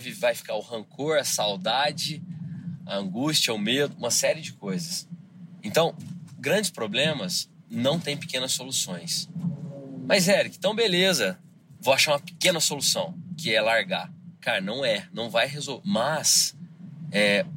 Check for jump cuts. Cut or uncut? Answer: cut